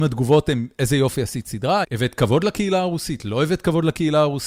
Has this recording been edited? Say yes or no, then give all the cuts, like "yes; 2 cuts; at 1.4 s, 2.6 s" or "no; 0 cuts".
yes; 1 cut; at 1.8 s